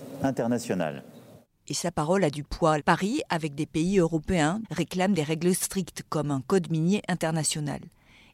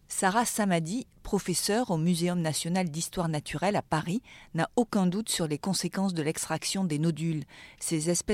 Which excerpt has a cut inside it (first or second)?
first